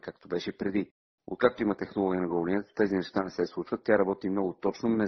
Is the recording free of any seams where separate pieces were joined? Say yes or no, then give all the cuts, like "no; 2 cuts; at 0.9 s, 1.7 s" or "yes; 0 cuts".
yes; 0 cuts